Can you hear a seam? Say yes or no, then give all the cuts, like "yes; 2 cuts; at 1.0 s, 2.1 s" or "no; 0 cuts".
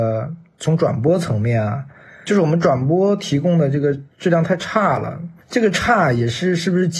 no; 0 cuts